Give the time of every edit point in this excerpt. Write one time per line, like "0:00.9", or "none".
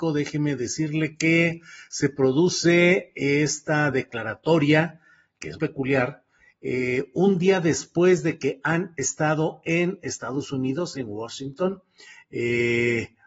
0:05.5
0:10.9